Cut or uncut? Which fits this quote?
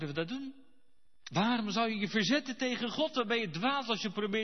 uncut